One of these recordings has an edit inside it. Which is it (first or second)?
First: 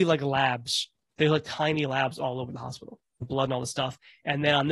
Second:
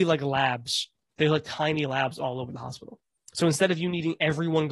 first